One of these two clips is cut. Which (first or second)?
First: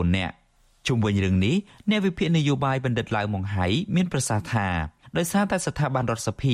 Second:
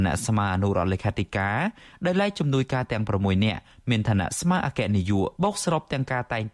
second